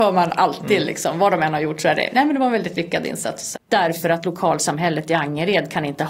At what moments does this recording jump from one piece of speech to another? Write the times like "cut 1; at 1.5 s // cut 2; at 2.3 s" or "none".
cut 1; at 3.5 s